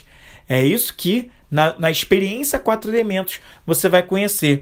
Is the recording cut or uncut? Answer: cut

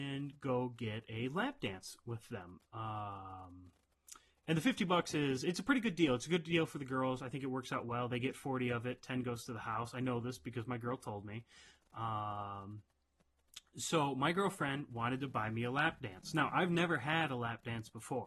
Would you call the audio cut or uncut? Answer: uncut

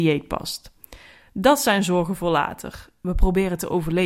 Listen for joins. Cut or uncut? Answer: uncut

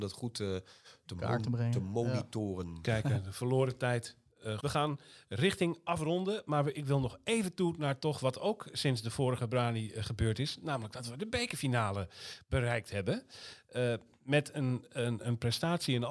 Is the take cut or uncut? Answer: cut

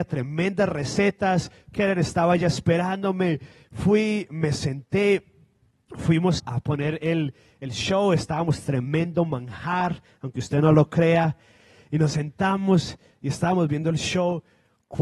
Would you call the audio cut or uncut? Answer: cut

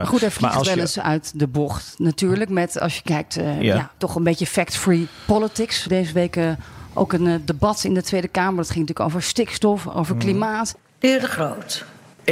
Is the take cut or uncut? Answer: uncut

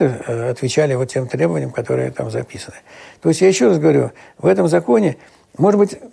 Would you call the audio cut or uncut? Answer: uncut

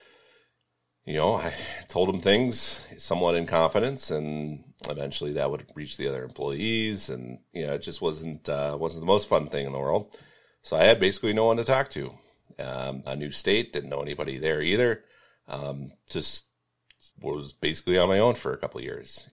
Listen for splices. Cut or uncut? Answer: cut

